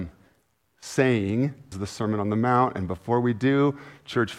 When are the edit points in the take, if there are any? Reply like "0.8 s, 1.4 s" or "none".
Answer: 1.7 s